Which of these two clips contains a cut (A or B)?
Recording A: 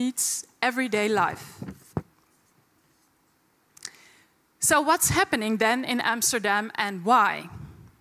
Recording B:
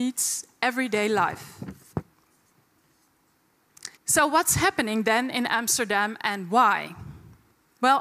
B